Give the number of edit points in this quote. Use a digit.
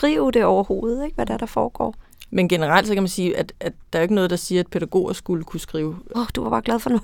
2